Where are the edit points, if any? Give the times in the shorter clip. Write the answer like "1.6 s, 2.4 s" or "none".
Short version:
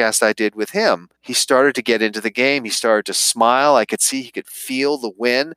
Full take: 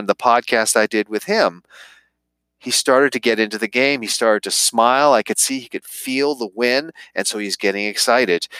1.1 s